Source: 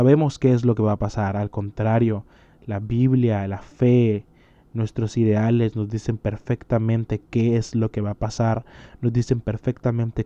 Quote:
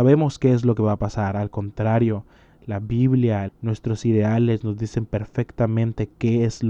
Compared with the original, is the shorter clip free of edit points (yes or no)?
no